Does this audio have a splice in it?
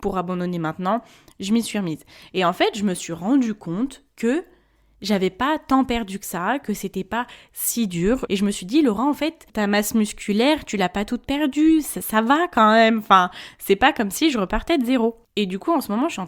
yes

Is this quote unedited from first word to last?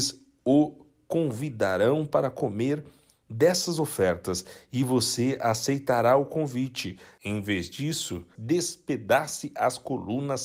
no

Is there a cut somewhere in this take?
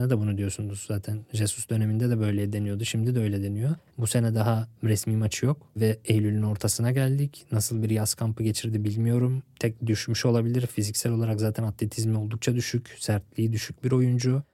yes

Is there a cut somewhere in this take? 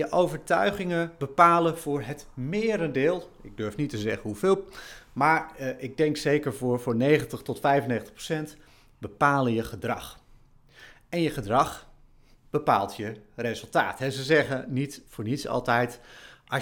no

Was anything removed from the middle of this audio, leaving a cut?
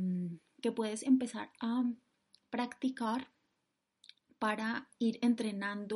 no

